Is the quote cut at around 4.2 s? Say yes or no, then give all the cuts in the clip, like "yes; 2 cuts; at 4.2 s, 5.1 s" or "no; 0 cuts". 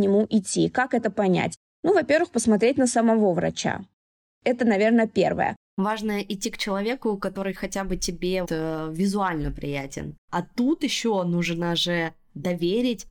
no; 3 cuts; at 5.7 s, 8.4 s, 10.2 s